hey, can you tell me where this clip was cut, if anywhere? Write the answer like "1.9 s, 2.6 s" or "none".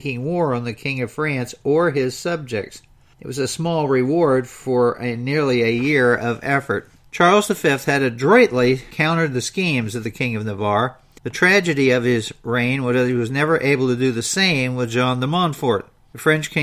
none